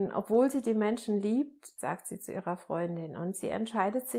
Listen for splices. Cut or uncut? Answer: cut